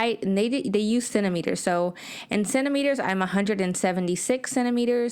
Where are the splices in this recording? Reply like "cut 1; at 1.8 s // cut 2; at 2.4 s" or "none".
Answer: none